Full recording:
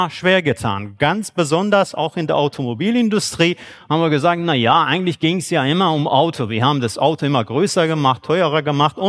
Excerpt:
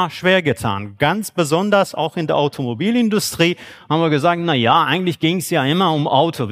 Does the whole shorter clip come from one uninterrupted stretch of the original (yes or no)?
yes